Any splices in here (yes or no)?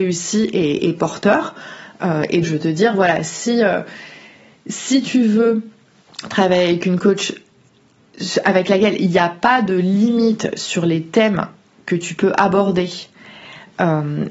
yes